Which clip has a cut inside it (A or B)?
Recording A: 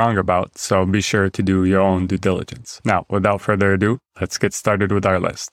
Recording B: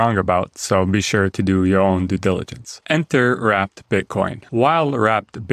B